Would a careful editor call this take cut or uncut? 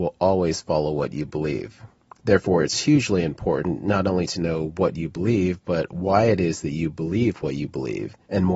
uncut